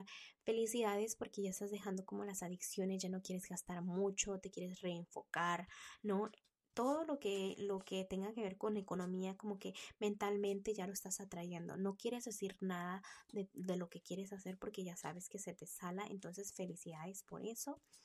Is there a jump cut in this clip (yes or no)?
no